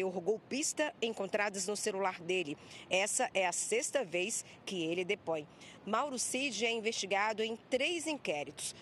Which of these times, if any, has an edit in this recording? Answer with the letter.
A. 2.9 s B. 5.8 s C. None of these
C